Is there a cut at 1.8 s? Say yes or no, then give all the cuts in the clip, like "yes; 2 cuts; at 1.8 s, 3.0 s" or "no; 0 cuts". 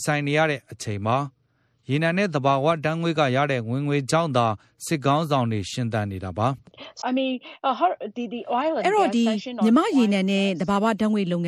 no; 1 cut; at 7.0 s